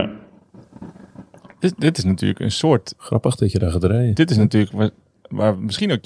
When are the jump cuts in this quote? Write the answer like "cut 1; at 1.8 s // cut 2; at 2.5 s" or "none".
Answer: none